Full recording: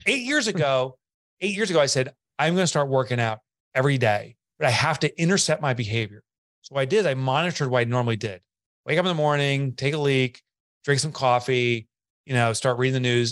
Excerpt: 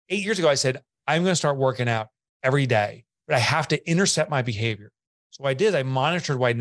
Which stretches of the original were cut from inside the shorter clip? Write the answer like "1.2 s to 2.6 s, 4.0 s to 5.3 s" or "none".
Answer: none